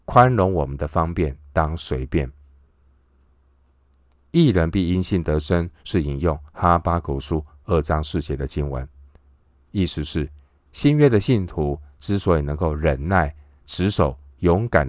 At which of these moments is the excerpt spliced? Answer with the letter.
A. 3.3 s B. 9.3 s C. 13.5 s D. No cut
A